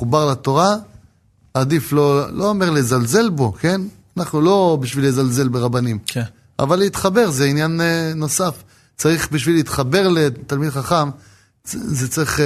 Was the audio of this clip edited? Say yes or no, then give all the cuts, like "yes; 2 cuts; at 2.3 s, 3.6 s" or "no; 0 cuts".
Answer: no; 0 cuts